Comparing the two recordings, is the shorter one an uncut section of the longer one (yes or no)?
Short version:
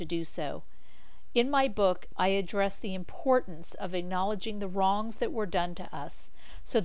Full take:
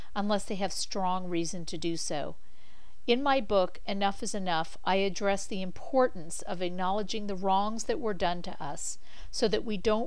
no